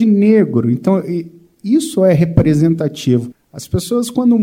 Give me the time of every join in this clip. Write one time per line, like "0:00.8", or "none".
0:03.3